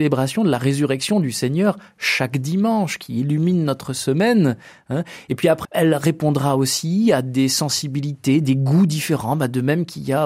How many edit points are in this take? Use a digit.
1